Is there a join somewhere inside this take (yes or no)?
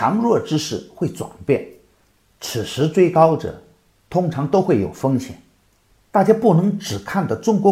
no